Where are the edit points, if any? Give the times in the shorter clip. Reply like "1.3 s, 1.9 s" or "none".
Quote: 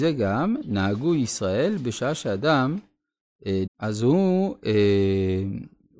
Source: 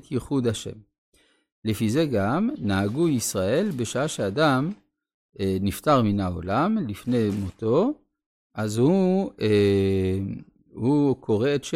3.7 s